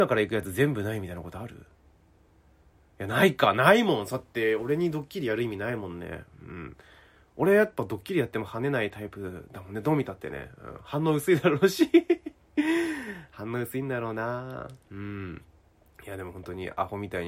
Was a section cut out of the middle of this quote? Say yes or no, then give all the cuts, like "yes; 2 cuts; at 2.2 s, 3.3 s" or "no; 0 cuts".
no; 0 cuts